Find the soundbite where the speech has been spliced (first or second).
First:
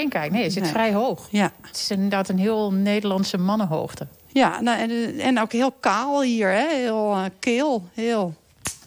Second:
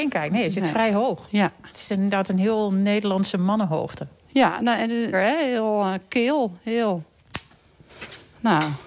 second